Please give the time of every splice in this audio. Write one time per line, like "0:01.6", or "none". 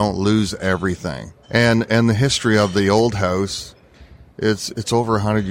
0:01.4